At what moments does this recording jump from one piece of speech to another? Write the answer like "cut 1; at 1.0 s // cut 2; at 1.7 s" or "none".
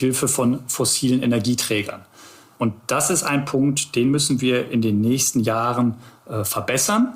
none